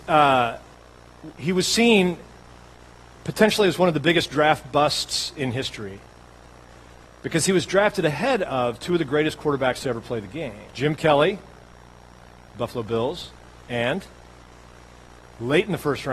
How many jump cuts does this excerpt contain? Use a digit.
1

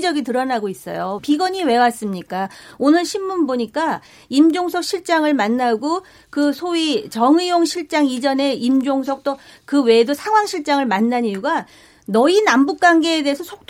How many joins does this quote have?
1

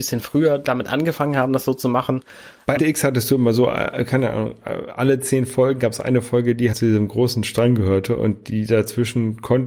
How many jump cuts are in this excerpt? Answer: 2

